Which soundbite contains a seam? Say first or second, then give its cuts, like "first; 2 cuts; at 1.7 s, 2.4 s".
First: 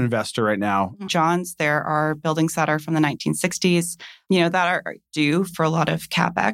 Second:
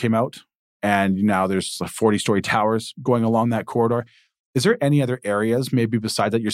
first; 2 cuts; at 1.1 s, 5.1 s